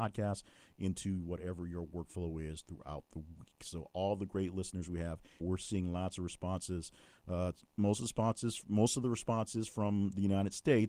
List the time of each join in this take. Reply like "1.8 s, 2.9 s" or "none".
5.4 s